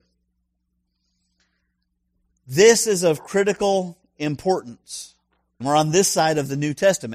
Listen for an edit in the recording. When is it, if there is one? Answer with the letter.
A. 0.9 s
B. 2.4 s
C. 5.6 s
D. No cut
C